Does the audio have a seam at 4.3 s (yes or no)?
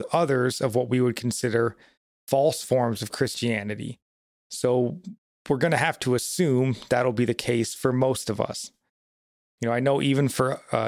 yes